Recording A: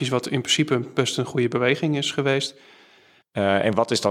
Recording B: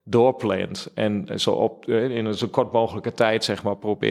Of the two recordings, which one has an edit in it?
A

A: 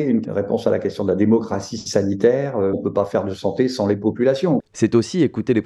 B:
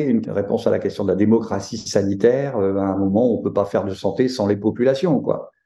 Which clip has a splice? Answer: A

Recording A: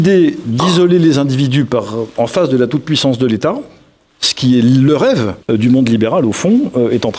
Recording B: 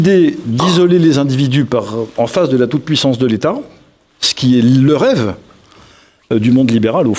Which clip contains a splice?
A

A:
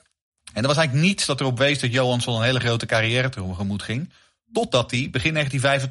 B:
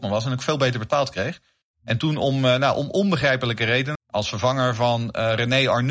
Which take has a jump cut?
B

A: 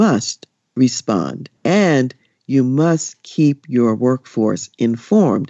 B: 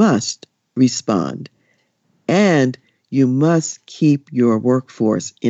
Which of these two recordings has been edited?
A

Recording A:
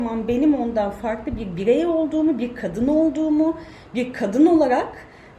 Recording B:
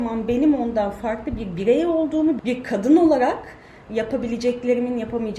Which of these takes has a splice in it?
B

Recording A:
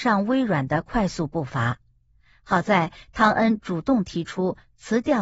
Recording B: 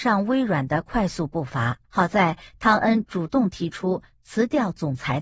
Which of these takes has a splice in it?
B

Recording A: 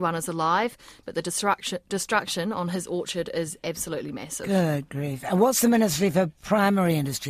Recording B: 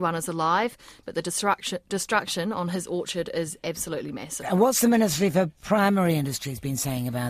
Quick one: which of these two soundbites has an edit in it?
B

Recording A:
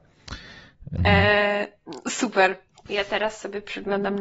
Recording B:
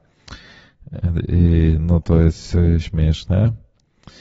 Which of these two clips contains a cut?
A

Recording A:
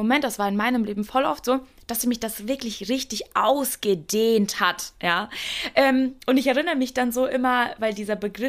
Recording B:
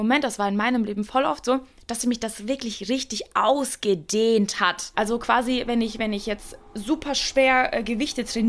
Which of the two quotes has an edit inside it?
B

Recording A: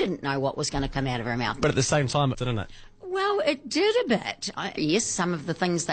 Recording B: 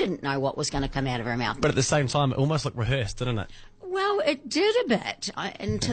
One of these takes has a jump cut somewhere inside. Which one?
A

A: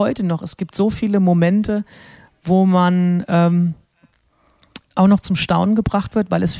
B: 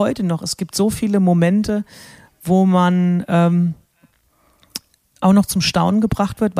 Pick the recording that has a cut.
A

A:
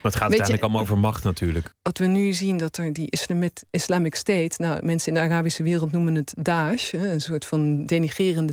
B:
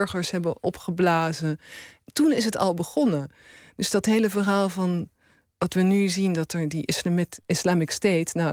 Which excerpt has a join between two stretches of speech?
A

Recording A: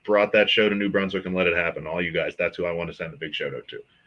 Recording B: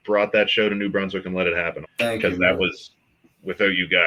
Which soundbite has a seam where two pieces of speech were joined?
B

